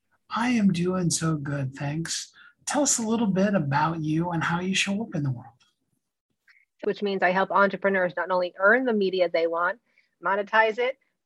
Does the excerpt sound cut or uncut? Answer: cut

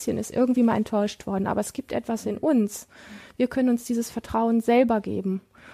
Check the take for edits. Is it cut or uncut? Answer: uncut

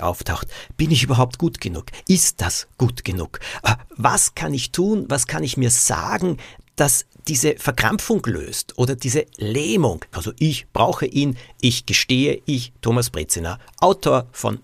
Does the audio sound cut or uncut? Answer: cut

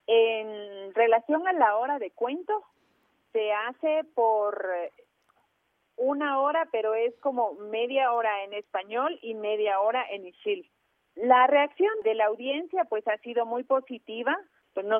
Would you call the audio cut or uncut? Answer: uncut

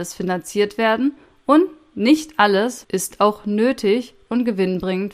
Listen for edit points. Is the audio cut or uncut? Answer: cut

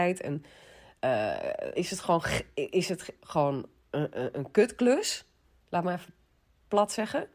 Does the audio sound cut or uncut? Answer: cut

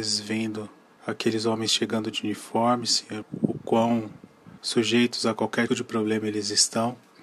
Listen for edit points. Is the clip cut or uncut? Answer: cut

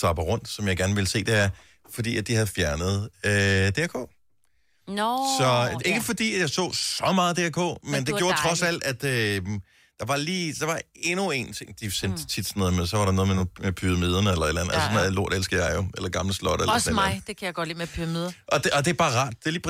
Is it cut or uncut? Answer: uncut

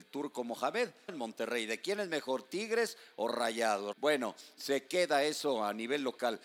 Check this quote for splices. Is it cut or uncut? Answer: cut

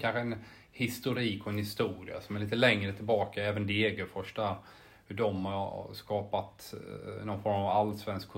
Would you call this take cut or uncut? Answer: uncut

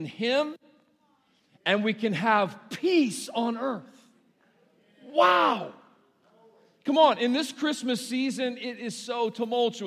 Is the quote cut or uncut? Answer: uncut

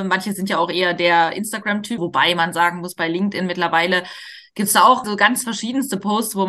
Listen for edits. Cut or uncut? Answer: cut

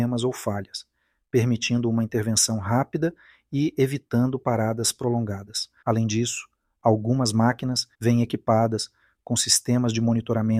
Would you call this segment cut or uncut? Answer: cut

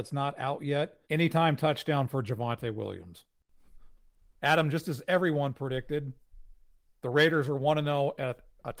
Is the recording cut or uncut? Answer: cut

